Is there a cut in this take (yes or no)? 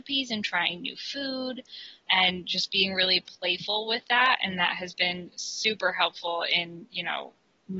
no